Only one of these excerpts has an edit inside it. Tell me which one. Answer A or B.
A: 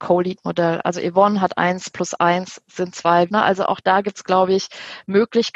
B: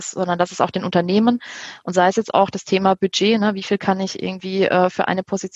A